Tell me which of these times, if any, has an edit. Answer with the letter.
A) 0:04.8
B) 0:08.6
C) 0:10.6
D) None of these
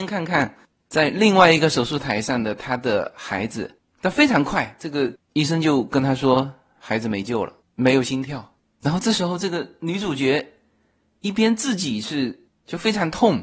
B